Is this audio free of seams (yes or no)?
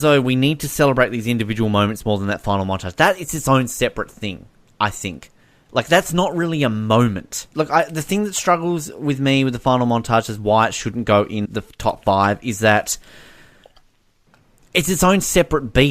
no